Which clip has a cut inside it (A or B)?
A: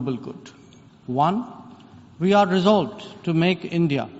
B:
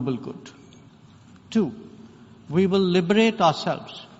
A